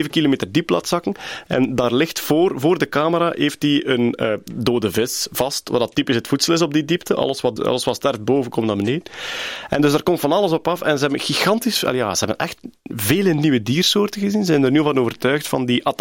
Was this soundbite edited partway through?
yes; 1 cut; at 7.6 s

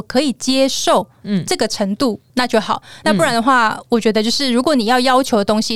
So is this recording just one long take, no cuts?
yes; 0 cuts

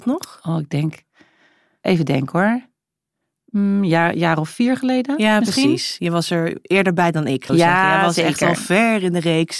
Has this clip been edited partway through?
yes; 1 cut; at 7.5 s

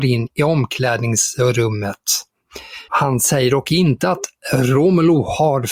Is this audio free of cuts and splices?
no; 1 cut; at 2.9 s

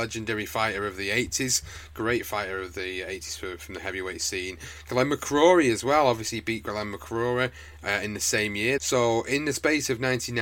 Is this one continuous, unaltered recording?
no; 1 cut; at 8.8 s

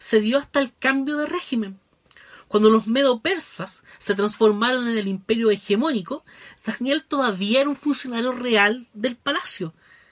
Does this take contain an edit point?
no; 0 cuts

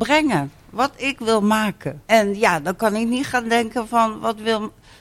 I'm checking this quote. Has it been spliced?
yes; 1 cut; at 2.0 s

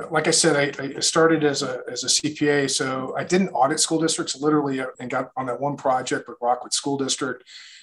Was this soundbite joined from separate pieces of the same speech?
yes; 1 cut; at 4.9 s

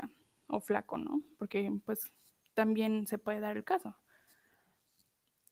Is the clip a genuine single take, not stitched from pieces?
yes; 0 cuts

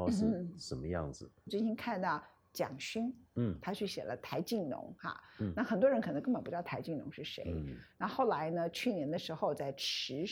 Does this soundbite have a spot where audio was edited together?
no; 0 cuts

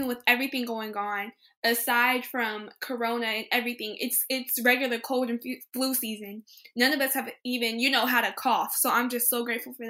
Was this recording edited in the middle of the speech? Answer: no; 0 cuts

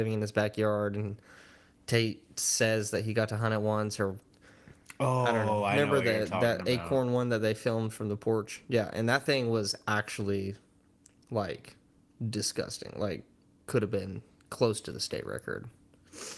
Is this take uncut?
yes; 0 cuts

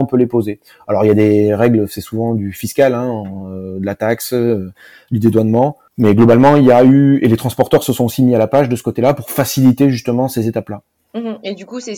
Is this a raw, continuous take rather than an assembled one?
yes; 0 cuts

